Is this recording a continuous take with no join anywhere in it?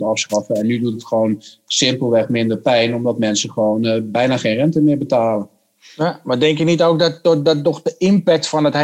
yes; 0 cuts

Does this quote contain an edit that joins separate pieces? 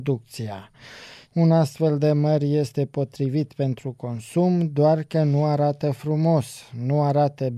yes; 1 cut; at 1.3 s

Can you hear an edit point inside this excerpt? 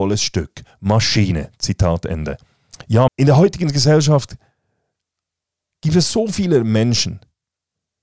yes; 1 cut; at 3.1 s

